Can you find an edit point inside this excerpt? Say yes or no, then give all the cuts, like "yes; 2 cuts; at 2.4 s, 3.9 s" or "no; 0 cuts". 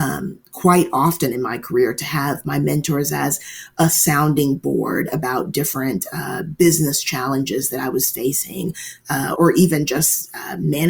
yes; 1 cut; at 9.4 s